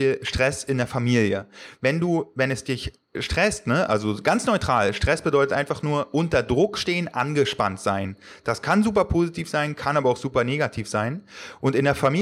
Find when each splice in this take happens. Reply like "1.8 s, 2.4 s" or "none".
none